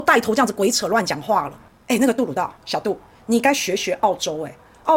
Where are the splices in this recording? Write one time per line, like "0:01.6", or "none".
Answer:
0:02.6

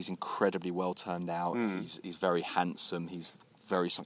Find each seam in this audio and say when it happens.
none

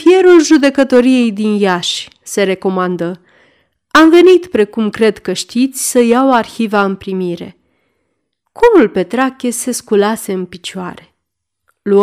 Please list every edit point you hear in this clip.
none

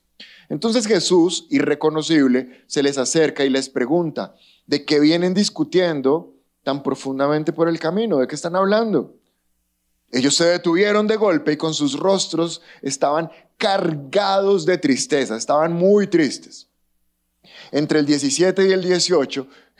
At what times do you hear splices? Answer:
none

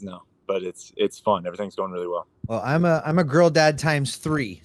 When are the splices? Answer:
0:02.4

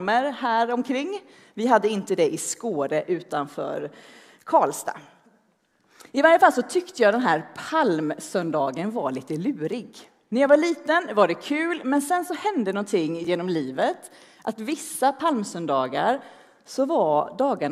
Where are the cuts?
none

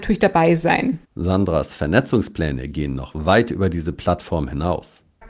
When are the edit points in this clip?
0:01.0

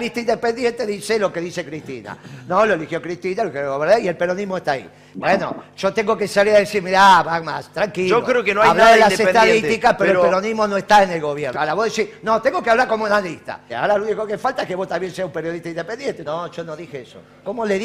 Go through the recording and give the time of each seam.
0:11.5
0:13.7
0:16.3

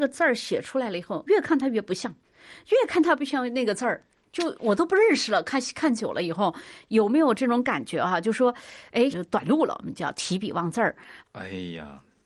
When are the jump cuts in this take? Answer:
0:01.3
0:09.1
0:11.2

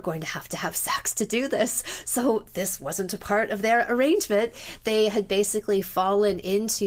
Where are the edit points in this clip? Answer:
none

